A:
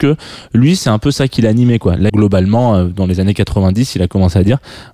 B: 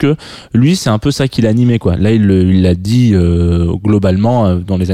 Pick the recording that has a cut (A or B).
A